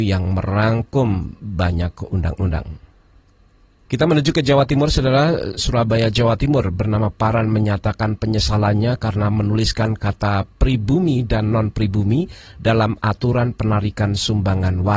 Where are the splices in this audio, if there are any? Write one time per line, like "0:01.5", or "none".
0:05.6